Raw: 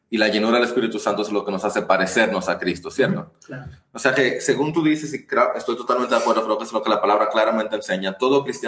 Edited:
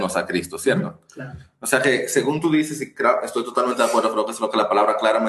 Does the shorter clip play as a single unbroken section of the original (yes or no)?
yes